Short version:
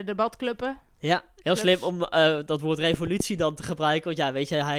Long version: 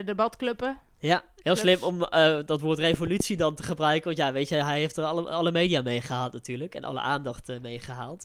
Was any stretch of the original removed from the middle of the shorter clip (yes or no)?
no